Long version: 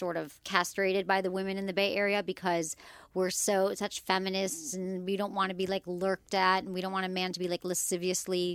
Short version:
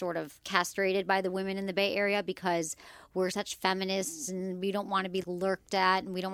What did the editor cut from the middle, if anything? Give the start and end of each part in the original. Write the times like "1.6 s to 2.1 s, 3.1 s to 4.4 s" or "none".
3.3 s to 3.8 s, 5.7 s to 5.8 s